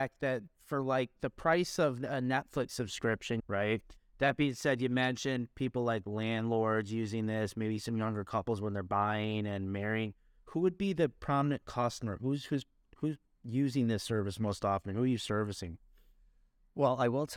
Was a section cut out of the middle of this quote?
yes; 1 cut; at 3.4 s

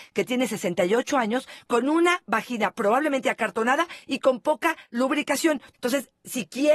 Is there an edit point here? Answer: yes; 1 cut; at 5.7 s

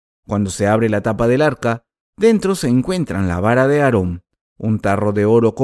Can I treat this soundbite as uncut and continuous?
yes; 0 cuts

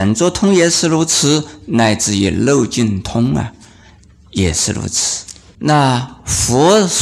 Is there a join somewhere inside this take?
yes; 1 cut; at 5.5 s

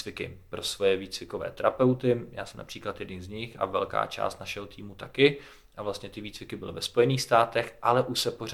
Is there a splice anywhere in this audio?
no; 0 cuts

